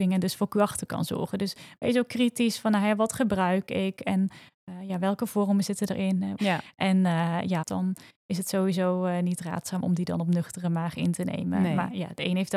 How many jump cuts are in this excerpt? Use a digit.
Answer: 2